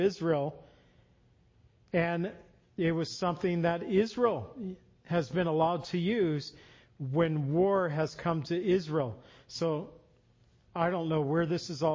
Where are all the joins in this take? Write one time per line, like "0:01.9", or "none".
none